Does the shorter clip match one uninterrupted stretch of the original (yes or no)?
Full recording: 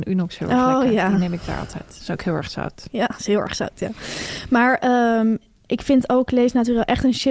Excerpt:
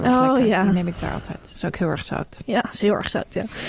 yes